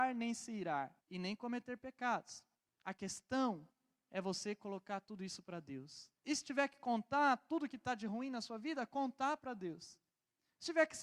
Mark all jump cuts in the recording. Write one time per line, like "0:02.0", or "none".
0:01.0